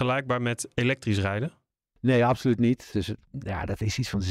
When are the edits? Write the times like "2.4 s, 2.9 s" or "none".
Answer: 2.9 s